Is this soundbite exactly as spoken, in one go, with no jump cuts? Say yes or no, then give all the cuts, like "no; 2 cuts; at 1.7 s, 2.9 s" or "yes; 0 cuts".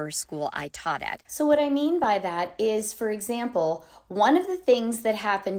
no; 1 cut; at 1.3 s